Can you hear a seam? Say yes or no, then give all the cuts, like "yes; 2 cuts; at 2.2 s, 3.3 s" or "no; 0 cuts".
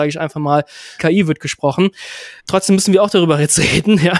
yes; 2 cuts; at 1.0 s, 2.4 s